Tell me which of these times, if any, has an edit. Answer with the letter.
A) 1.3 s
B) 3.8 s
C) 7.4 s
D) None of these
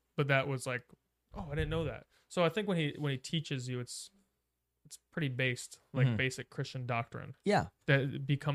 A